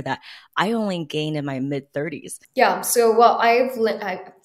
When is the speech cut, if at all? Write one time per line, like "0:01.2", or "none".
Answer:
0:02.4